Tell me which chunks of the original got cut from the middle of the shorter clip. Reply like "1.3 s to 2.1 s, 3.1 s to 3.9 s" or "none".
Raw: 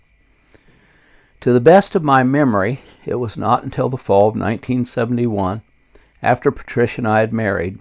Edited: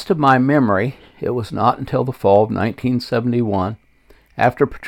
none